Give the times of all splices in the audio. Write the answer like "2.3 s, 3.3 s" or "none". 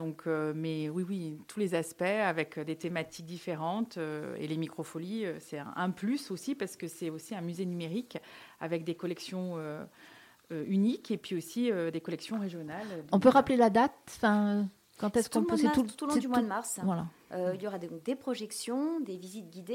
none